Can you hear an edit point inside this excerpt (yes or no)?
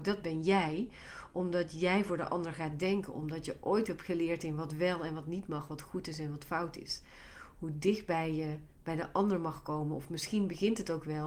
no